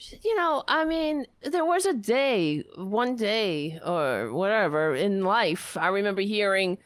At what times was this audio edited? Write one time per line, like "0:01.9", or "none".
0:01.4